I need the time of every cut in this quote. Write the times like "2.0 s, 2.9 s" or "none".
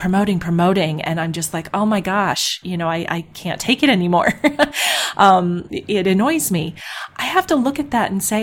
none